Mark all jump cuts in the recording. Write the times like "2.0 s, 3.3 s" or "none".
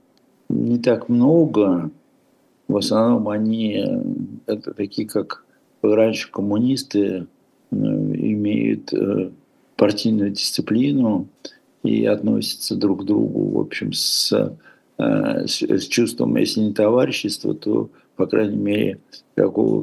none